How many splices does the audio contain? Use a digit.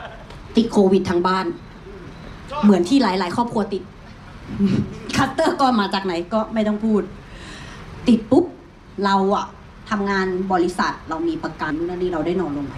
1